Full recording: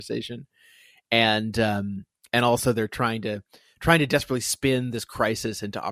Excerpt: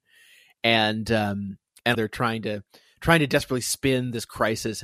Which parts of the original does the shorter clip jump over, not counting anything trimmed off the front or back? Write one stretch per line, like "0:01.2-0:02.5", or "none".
0:02.4-0:02.7